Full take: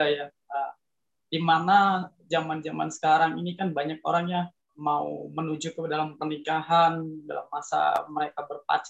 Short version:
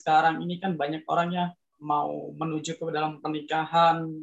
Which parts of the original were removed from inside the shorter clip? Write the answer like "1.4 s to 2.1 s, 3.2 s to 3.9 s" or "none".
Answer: none